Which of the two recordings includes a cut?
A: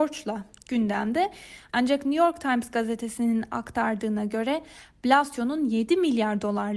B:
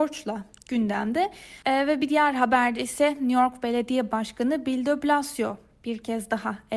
B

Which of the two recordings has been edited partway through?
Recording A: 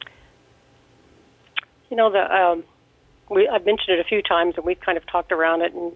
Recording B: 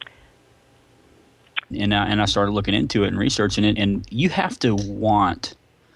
B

